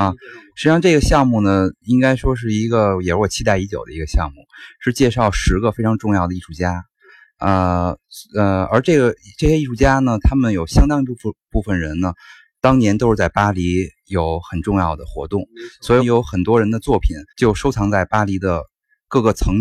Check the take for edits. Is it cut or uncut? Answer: cut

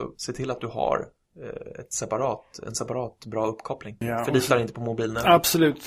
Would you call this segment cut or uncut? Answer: uncut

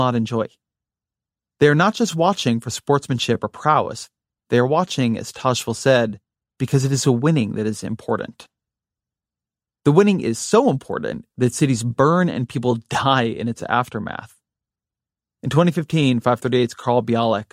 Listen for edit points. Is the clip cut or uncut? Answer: uncut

